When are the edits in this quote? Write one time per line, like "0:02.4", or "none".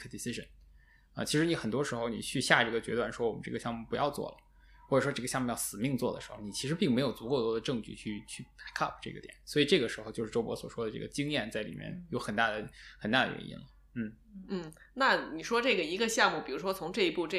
none